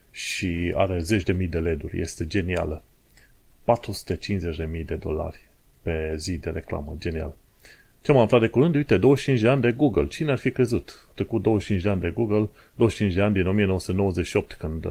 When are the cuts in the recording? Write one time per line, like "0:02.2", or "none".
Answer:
none